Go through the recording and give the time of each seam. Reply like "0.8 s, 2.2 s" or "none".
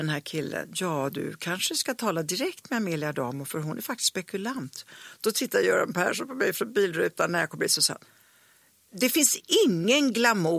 8.9 s